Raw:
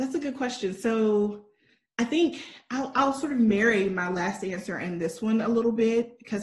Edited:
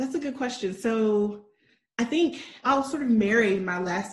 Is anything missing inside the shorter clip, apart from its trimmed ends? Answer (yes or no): yes